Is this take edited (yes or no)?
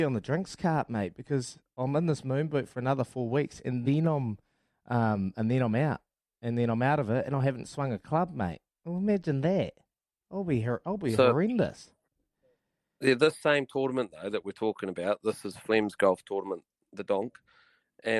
no